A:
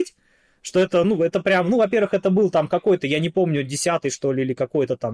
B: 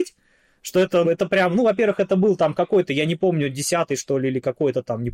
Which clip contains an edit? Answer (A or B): B